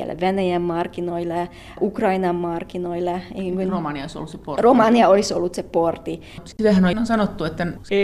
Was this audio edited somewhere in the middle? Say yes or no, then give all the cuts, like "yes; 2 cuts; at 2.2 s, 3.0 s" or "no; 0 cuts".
no; 0 cuts